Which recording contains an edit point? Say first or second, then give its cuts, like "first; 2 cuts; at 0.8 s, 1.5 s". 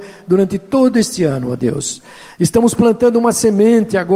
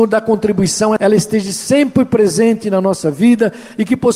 second; 1 cut; at 1.0 s